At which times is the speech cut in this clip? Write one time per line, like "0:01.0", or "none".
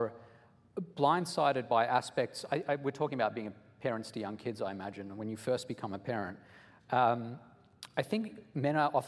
none